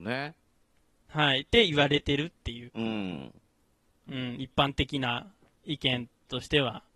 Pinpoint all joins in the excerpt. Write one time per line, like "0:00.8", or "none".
0:02.7